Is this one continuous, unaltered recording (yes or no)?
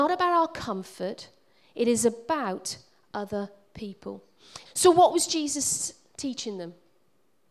no